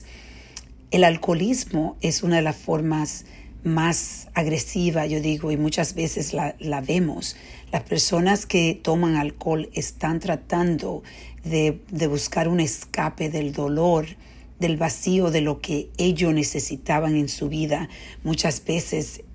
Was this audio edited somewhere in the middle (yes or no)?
no